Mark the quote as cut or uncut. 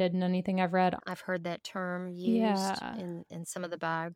cut